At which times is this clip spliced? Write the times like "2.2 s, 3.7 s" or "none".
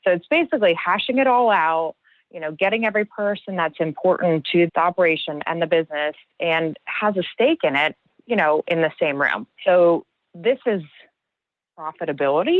4.7 s, 9.6 s

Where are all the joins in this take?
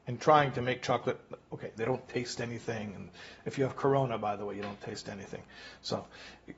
1.8 s

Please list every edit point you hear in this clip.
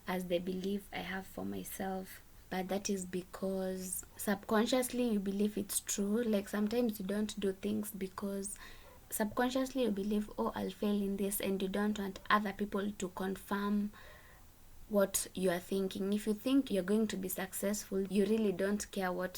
2.4 s, 16.7 s, 18.1 s

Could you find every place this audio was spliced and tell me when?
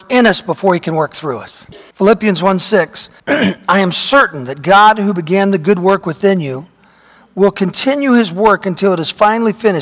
1.9 s, 3.2 s

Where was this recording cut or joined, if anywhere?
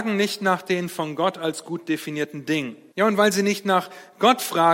2.9 s

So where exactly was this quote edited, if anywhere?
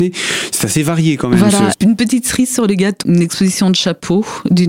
1.7 s, 3.0 s

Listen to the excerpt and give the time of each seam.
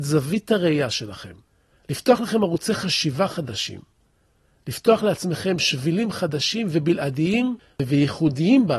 none

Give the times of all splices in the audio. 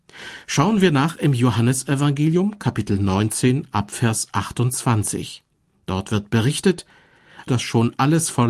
7.5 s

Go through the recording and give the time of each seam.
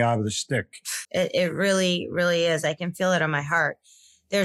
1.0 s

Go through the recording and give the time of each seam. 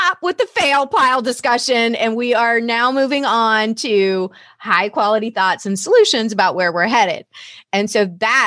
none

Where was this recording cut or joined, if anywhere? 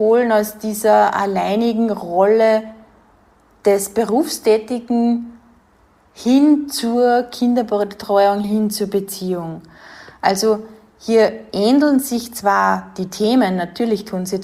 8.4 s

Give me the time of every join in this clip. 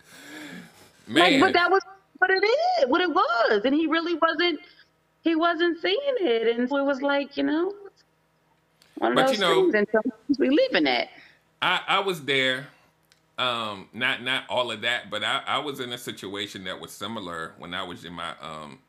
6.7 s

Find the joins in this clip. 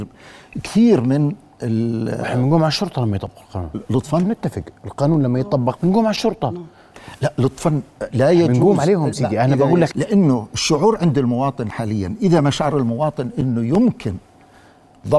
9.9 s

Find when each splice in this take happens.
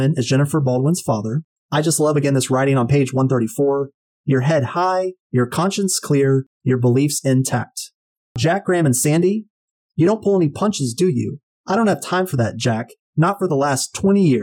none

